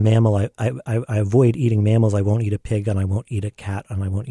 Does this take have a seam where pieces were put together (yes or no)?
no